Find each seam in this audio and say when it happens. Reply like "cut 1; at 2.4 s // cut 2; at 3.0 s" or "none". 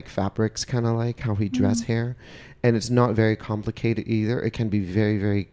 none